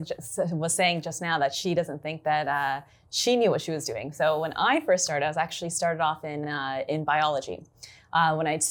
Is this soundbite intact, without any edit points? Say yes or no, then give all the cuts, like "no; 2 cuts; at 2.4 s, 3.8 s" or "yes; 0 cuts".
yes; 0 cuts